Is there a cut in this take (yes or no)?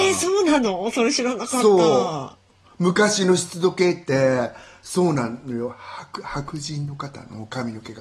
no